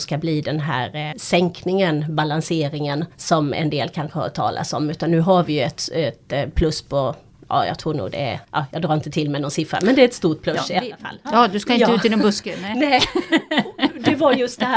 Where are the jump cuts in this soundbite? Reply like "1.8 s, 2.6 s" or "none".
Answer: 1.1 s, 8.4 s, 11.2 s